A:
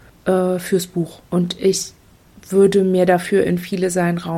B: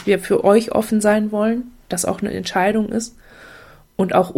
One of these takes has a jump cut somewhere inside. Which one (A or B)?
A